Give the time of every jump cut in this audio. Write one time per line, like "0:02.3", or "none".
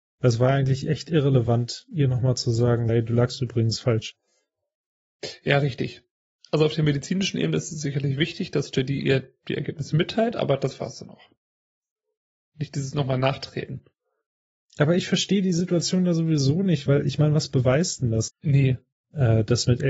0:02.9
0:18.3